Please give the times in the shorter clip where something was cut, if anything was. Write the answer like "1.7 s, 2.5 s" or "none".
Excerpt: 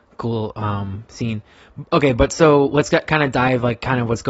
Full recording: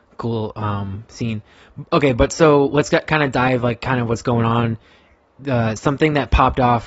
none